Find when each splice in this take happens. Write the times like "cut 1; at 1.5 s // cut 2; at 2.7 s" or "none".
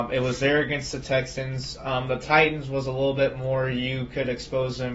none